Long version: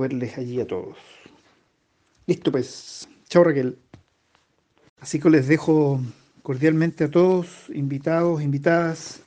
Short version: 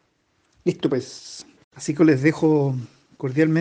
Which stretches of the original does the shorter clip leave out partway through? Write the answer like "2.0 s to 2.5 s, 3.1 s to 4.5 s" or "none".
3.2 s to 4.8 s